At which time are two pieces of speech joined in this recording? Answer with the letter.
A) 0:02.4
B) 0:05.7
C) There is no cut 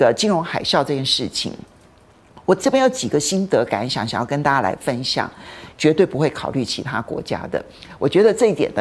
B